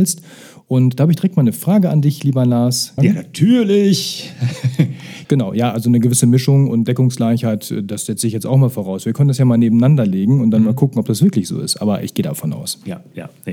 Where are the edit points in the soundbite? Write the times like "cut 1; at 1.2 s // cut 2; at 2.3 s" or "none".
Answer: cut 1; at 3.0 s // cut 2; at 5.2 s